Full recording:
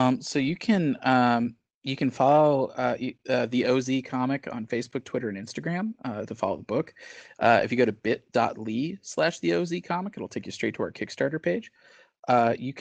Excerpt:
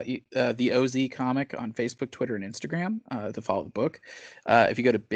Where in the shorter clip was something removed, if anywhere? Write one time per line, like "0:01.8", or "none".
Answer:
none